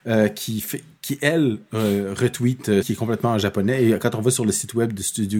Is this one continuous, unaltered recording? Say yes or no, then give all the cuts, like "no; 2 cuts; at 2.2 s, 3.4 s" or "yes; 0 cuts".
no; 1 cut; at 2.8 s